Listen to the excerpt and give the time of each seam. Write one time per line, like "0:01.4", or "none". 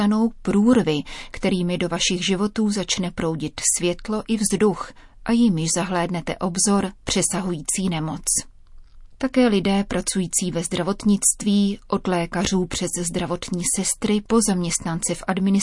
none